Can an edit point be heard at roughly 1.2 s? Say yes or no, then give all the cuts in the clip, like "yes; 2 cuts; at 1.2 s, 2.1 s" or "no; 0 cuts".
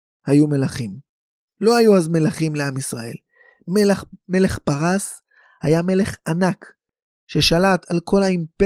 no; 0 cuts